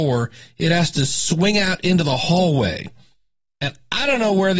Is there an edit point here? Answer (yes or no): no